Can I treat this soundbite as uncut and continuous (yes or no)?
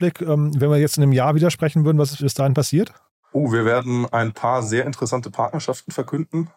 yes